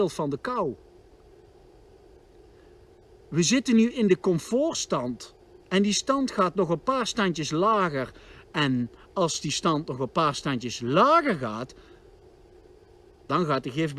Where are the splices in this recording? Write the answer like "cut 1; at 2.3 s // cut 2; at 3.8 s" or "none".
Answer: none